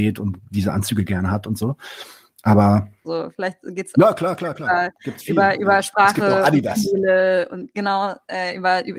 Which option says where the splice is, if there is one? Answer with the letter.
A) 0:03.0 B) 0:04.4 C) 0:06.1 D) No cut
A